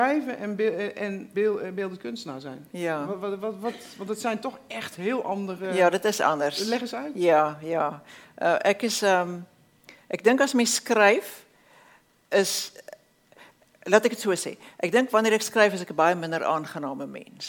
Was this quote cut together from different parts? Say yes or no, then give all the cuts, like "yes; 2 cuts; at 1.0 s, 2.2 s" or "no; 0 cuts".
yes; 1 cut; at 1.3 s